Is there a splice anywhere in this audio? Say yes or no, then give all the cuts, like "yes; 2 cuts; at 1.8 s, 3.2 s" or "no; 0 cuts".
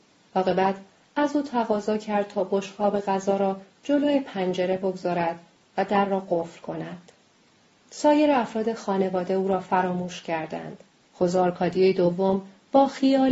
yes; 1 cut; at 11.0 s